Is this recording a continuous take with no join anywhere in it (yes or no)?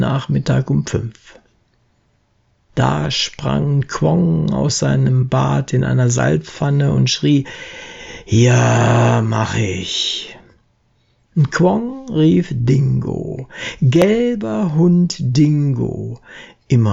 yes